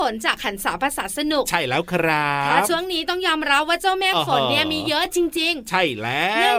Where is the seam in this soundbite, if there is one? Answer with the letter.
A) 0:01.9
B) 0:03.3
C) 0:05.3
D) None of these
D